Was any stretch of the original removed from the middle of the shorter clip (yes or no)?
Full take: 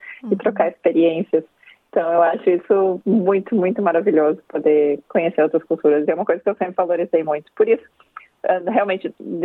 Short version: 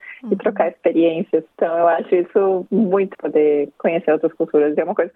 yes